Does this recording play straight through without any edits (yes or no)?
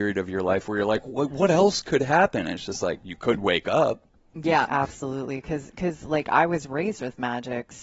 no